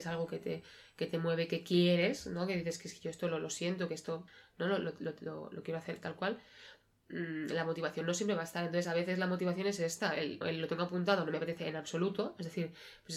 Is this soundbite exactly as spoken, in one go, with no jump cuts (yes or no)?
no